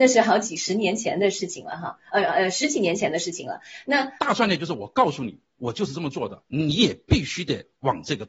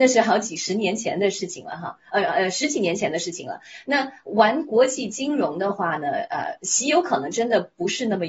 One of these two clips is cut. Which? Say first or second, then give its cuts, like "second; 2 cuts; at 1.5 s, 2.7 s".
first; 2 cuts; at 4.2 s, 6.5 s